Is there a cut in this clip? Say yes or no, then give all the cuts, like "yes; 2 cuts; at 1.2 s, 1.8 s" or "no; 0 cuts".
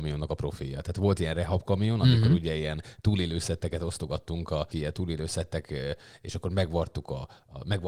yes; 1 cut; at 4.7 s